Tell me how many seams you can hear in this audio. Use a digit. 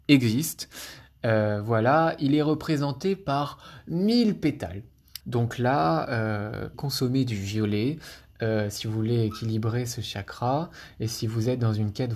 2